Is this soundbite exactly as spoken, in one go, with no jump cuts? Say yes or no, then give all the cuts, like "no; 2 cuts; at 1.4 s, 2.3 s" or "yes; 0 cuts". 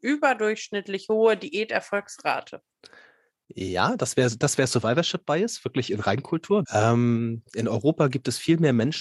no; 1 cut; at 6.6 s